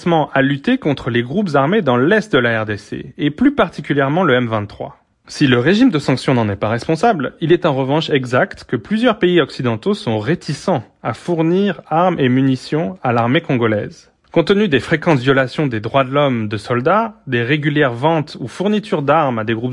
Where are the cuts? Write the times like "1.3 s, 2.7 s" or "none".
5.1 s